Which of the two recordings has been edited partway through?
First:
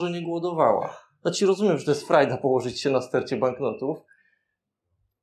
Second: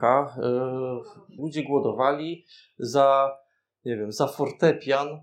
second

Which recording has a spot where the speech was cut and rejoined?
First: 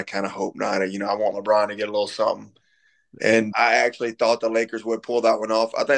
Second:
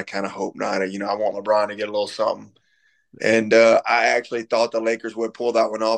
first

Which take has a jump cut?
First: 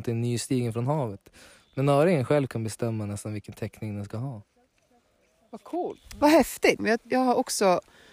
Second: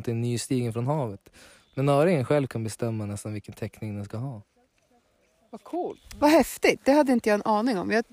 first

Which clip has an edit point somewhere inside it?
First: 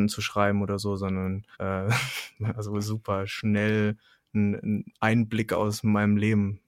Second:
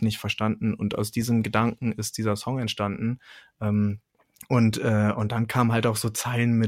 first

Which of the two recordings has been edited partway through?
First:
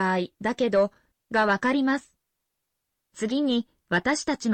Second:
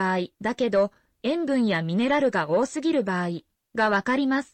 first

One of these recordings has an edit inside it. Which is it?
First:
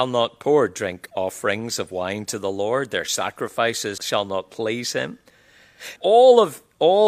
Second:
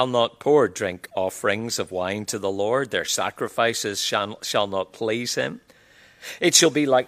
first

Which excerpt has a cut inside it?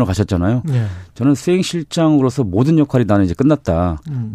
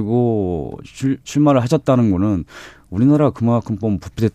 second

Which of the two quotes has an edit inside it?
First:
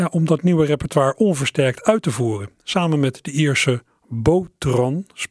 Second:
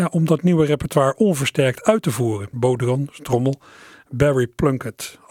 second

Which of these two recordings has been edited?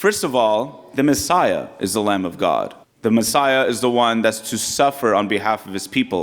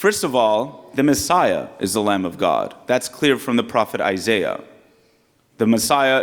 first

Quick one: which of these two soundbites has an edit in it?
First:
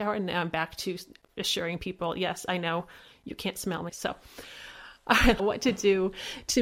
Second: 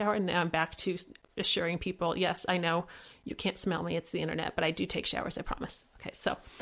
first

